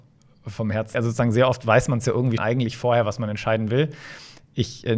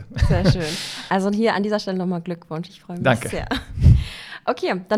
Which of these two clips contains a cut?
first; 2 cuts; at 0.9 s, 2.4 s

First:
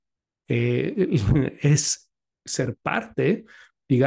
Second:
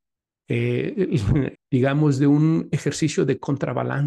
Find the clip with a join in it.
second; 1 cut; at 1.6 s

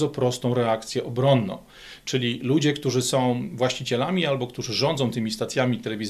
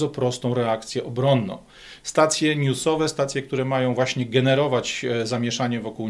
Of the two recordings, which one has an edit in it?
second; 1 cut; at 2.0 s

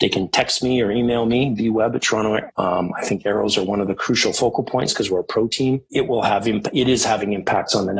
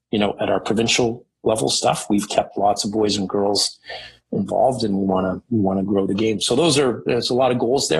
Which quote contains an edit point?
first; 2 cuts; at 2.5 s, 5.9 s

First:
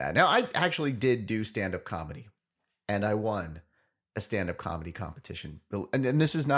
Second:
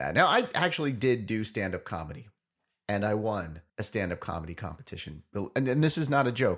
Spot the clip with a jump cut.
second; 1 cut; at 3.7 s

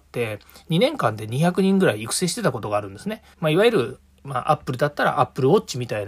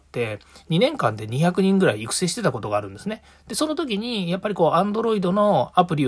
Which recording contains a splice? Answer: first; 1 cut; at 3.3 s

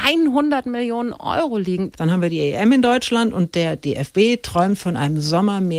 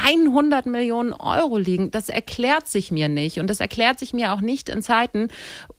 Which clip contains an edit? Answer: first; 1 cut; at 1.9 s

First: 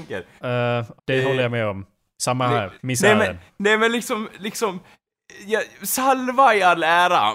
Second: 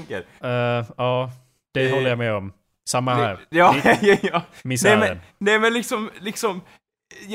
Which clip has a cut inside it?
first; 2 cuts; at 1.0 s, 2.8 s

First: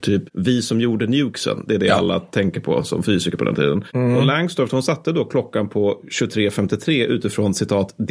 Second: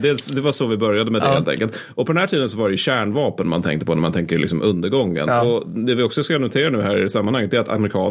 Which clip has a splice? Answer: first; 1 cut; at 3.9 s

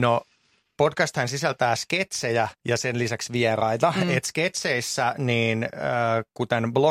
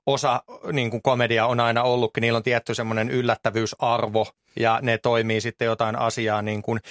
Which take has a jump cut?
first; 1 cut; at 2.6 s

